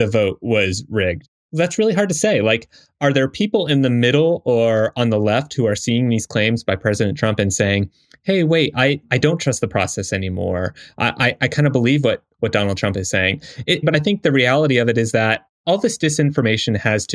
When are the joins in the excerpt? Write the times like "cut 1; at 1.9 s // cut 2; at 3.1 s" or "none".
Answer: cut 1; at 13.8 s